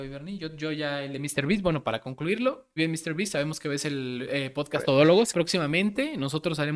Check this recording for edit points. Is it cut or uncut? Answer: cut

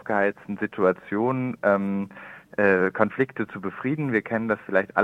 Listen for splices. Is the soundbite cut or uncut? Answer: uncut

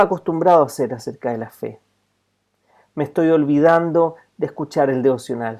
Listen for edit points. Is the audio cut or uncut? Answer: uncut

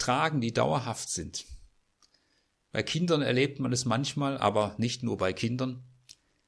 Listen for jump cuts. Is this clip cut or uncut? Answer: uncut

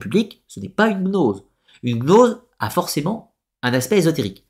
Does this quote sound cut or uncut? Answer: uncut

